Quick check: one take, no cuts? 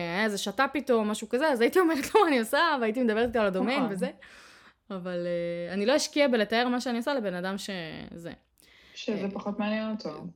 yes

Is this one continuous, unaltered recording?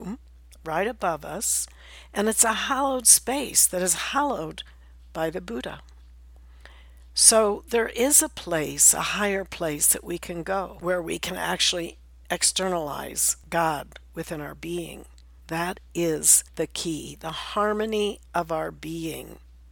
no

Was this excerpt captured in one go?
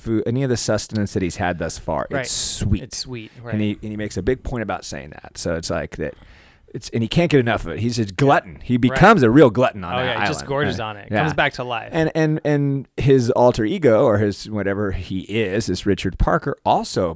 yes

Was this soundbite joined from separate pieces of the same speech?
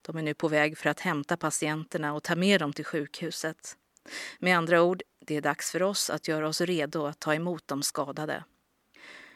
no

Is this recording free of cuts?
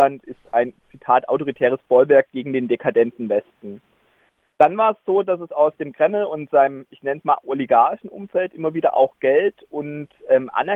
yes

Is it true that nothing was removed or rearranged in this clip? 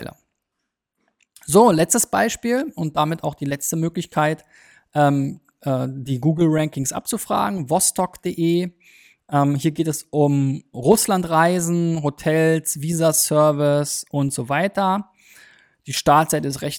no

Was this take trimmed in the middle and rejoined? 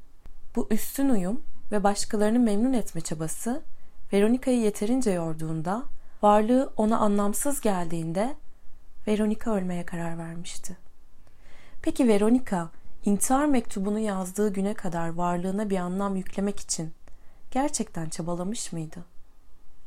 yes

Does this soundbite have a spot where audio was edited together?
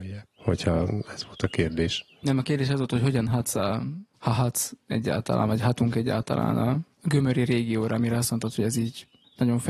no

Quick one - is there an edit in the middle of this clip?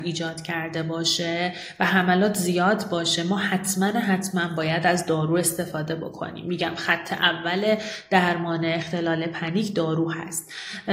no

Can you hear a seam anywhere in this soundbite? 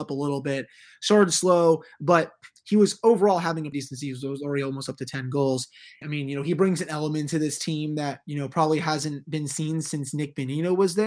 yes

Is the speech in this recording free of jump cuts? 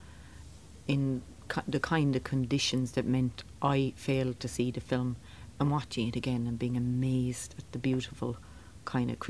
yes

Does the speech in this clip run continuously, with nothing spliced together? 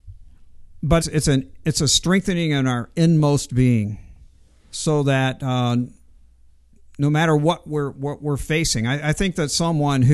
no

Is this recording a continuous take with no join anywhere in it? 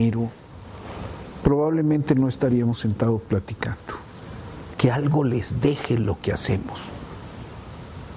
no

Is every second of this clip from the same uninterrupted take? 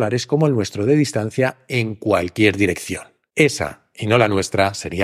yes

